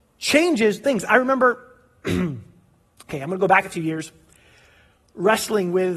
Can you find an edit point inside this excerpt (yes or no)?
no